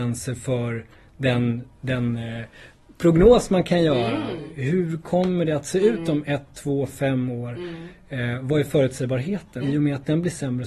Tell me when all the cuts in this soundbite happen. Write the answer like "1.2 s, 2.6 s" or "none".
9.6 s